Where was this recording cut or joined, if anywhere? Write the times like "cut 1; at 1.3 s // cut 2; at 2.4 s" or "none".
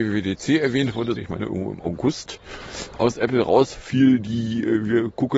cut 1; at 1.2 s